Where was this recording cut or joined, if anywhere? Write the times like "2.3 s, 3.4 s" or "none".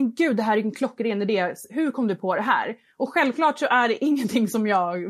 none

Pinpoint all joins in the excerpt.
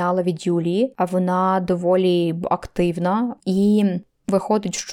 3.4 s

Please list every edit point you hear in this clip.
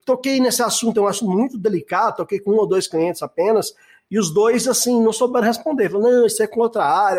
none

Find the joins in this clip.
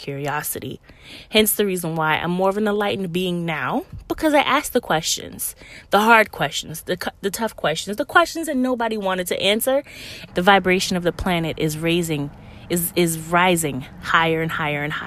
10.3 s

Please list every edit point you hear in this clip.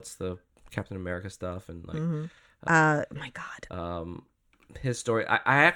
2.7 s, 3.7 s

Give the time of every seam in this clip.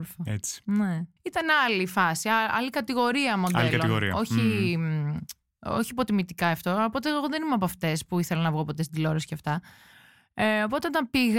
1.2 s

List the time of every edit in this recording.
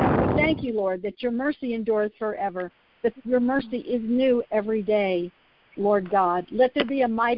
none

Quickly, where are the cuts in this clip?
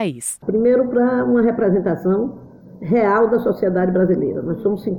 none

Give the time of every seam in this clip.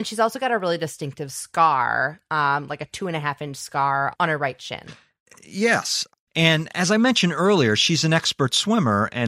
6.3 s

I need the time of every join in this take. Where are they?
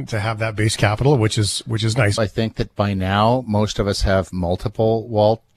2.2 s

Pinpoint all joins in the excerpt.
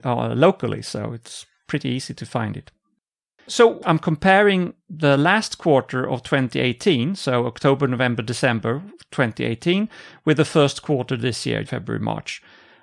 11.7 s

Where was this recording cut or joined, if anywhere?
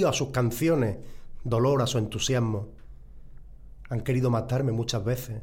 none

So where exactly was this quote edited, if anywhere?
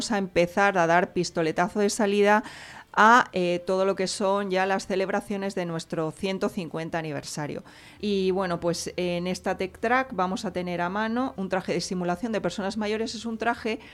8.0 s, 11.3 s

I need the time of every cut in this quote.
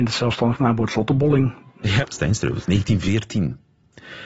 2.0 s

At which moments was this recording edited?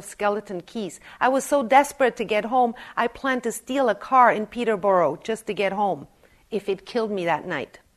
none

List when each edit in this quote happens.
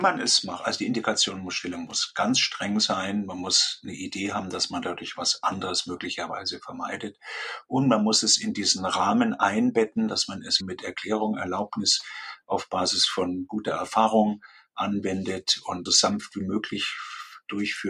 10.6 s, 15.9 s

